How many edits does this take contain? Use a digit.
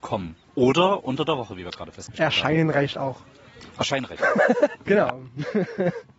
1